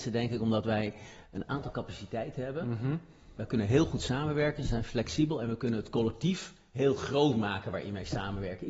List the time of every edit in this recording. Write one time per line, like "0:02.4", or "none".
none